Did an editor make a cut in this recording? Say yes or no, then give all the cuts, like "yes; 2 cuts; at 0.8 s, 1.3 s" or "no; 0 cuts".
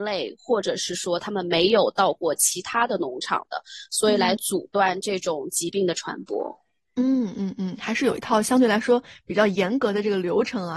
no; 0 cuts